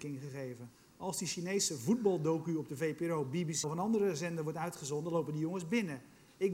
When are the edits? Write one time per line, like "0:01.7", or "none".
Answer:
0:03.6